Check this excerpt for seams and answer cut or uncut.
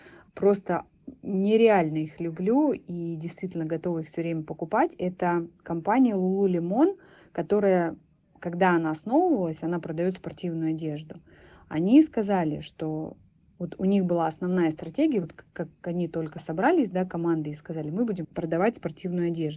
uncut